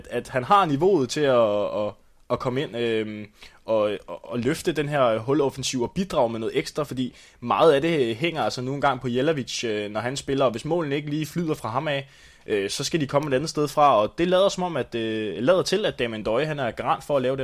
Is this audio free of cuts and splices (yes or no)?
yes